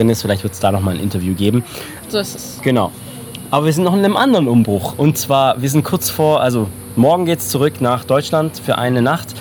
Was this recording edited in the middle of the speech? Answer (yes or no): yes